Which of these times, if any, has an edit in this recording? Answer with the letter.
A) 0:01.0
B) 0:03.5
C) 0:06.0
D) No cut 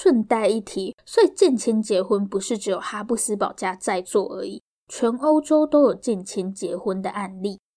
A